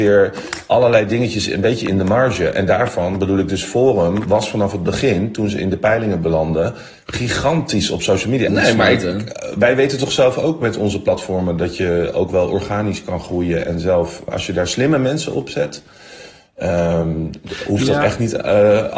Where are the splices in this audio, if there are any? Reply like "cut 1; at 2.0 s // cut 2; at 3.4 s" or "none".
cut 1; at 8.5 s // cut 2; at 14.3 s